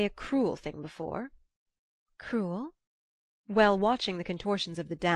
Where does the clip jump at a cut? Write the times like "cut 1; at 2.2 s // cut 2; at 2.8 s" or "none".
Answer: none